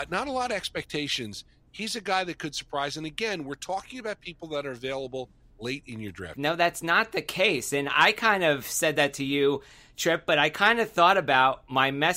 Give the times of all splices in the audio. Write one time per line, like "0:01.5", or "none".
0:06.3